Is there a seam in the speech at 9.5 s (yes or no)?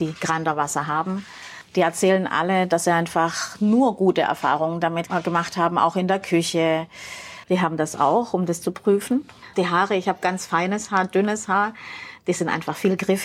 yes